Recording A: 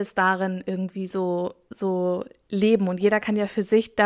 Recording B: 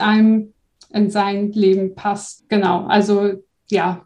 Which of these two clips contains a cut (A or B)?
B